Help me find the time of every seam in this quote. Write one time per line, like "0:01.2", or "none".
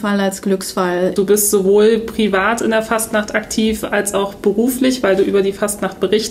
0:01.2